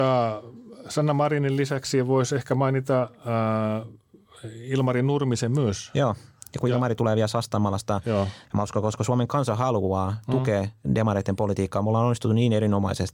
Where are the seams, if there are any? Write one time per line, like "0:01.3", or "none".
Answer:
0:08.4